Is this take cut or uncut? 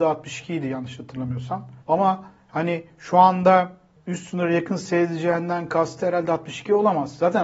cut